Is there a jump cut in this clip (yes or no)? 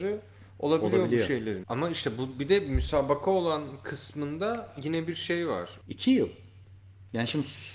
yes